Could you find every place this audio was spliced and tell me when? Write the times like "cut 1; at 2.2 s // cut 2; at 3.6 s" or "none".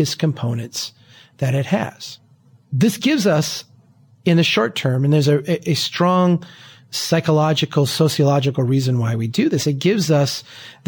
none